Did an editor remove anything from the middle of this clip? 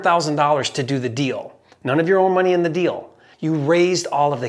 yes; 1 cut; at 3.3 s

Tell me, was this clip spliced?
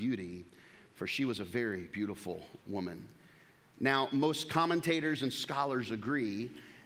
no; 0 cuts

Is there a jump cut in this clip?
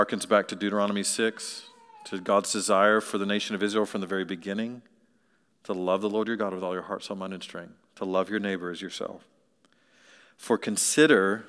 no; 0 cuts

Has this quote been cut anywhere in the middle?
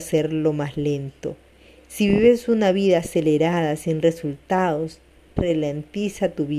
yes; 1 cut; at 5.4 s

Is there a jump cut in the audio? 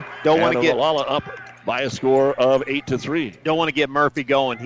no; 0 cuts

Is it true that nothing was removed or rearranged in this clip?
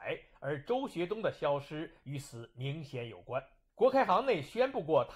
no; 1 cut; at 3.7 s

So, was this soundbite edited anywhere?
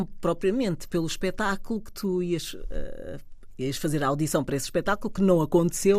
no; 0 cuts

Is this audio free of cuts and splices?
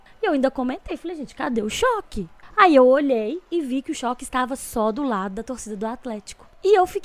yes; 0 cuts

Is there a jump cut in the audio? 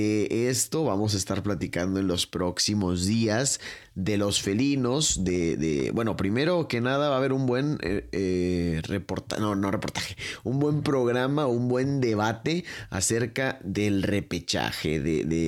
no; 0 cuts

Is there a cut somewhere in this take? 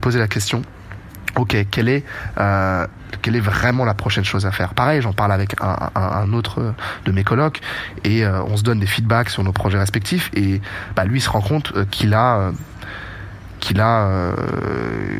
no; 0 cuts

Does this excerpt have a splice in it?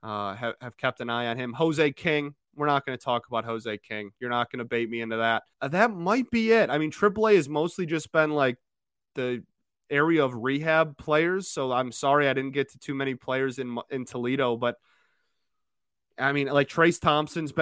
yes; 1 cut; at 5.5 s

